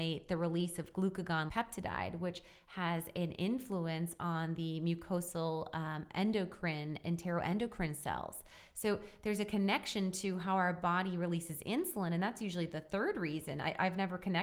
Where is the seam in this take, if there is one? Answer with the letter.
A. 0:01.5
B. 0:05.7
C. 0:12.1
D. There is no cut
A